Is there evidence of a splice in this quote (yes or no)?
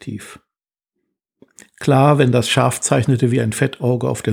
no